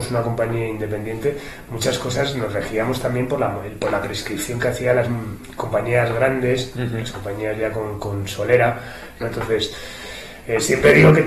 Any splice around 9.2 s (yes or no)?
yes